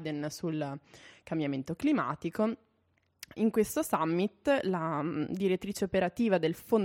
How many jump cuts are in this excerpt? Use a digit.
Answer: 1